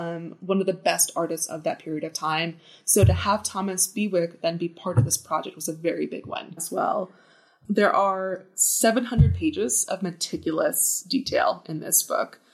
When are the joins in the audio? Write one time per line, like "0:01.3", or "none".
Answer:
0:06.6